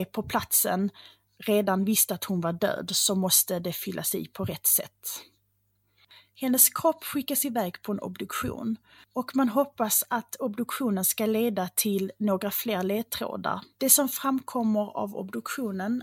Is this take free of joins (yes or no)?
no